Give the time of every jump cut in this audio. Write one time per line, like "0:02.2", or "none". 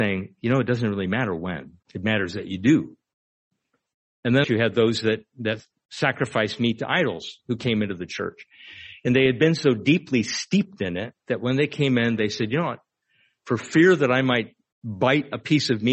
0:01.8
0:04.4